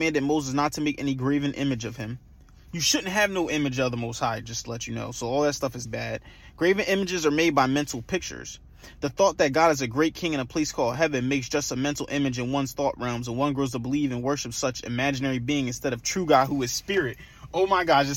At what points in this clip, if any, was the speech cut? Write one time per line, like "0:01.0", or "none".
0:05.9